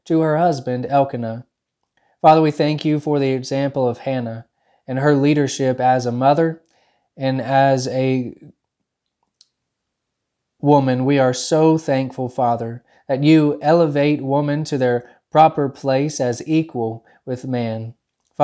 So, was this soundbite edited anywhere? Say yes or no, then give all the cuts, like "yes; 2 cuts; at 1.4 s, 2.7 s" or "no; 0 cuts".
no; 0 cuts